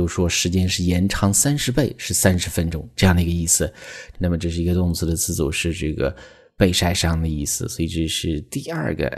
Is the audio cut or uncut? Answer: cut